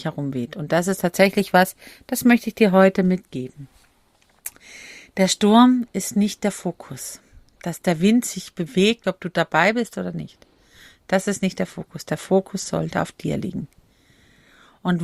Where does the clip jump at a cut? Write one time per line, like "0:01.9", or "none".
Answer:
0:09.0